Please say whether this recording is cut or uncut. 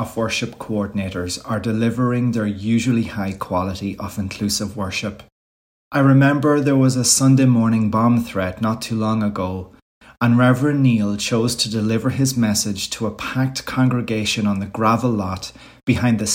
cut